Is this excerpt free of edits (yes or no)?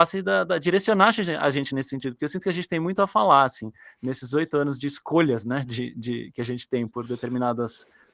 yes